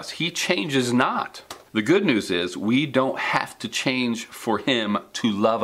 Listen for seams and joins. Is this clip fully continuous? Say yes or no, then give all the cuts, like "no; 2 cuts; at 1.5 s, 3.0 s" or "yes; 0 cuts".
no; 1 cut; at 1.7 s